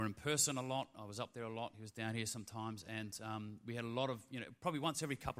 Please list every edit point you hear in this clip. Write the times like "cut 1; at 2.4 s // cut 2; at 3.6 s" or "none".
none